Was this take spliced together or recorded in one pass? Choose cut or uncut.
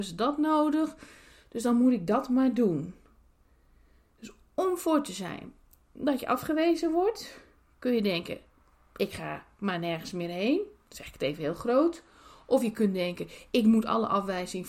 uncut